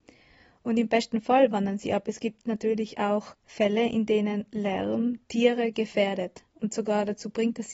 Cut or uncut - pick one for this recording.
uncut